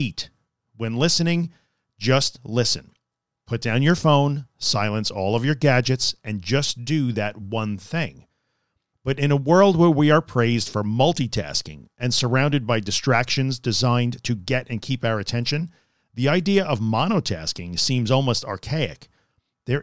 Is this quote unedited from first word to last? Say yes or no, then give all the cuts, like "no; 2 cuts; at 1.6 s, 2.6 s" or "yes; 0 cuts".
no; 1 cut; at 8.9 s